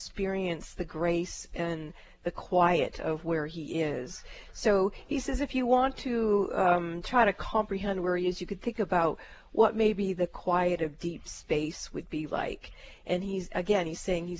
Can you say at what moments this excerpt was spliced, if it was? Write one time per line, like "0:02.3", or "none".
none